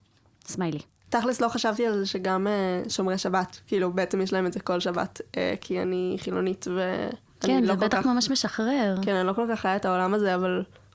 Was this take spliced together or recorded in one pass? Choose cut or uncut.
uncut